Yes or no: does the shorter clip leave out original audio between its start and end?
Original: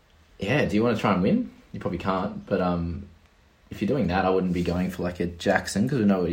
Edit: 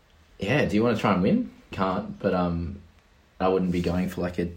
yes